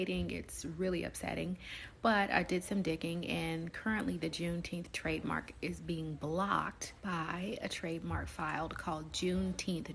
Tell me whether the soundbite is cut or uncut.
cut